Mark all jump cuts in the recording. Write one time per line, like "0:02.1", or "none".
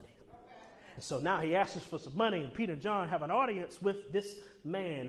none